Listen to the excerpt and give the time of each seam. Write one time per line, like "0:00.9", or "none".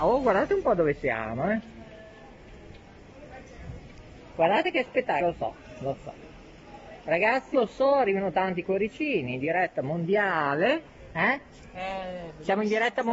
0:05.2
0:07.5
0:11.7